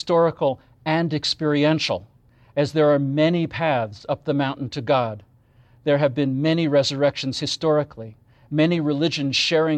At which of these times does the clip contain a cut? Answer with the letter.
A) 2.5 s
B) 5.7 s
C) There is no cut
C